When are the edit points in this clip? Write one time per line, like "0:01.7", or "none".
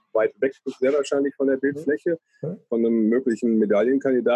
none